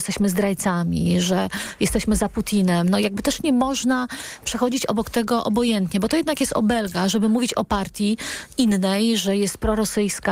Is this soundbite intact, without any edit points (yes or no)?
yes